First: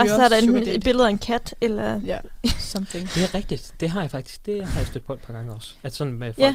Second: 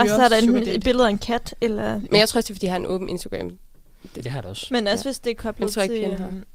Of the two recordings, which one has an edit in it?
second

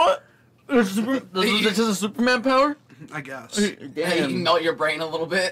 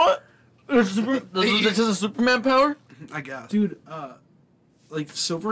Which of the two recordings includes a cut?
second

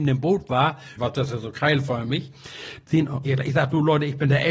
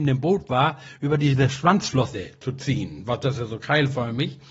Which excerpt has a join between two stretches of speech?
first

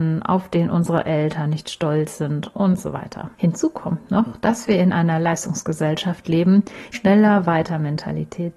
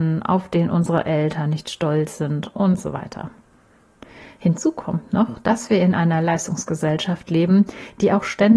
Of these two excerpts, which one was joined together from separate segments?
first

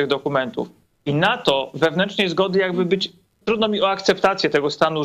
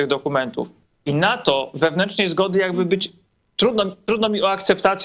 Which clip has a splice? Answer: first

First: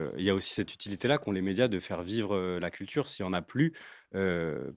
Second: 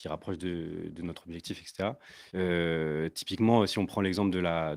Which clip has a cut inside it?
second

